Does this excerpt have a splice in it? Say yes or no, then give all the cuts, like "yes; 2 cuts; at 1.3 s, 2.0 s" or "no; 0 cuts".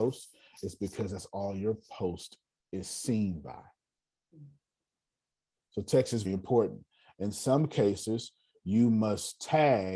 yes; 1 cut; at 6.2 s